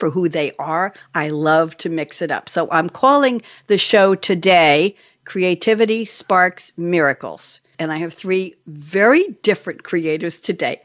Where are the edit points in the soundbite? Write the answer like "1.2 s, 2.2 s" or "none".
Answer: 7.7 s